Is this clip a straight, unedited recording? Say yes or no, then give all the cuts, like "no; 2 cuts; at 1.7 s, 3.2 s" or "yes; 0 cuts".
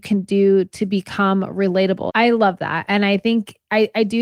no; 1 cut; at 2.1 s